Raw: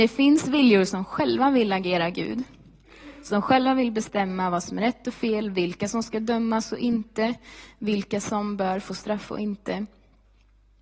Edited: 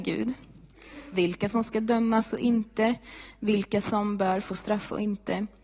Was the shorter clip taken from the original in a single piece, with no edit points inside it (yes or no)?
no